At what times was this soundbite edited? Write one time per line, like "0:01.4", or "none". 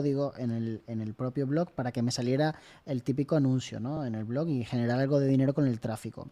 none